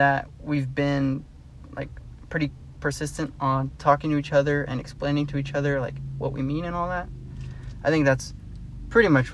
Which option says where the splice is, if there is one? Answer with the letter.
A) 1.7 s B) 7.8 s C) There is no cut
C